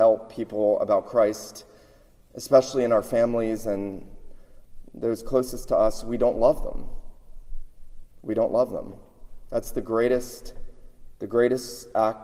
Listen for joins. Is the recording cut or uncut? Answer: uncut